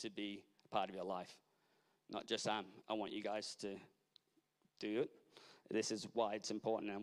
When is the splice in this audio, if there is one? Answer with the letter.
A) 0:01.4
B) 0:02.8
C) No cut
B